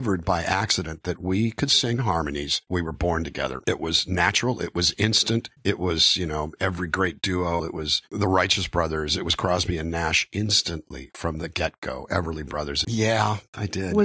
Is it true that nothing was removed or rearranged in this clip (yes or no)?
no